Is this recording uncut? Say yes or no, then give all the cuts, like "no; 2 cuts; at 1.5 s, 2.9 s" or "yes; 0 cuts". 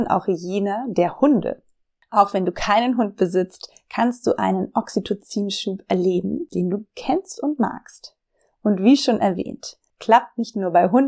no; 1 cut; at 6.5 s